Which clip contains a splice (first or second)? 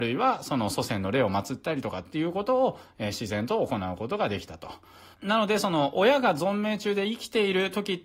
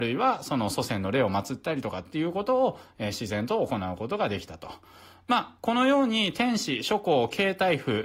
first